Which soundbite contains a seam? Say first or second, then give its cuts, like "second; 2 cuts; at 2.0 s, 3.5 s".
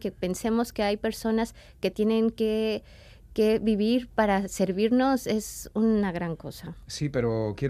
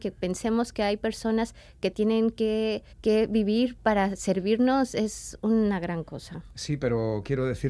second; 1 cut; at 2.9 s